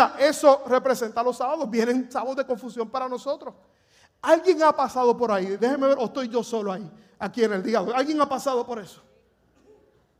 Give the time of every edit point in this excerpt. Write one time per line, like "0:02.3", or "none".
none